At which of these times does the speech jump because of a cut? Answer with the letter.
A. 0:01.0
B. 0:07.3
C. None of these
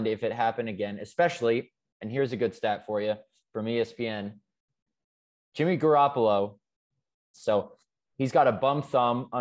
B